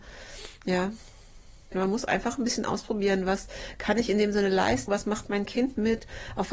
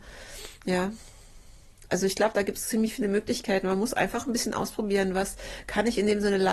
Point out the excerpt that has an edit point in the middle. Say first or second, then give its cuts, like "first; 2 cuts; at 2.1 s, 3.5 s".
first; 2 cuts; at 1.7 s, 4.9 s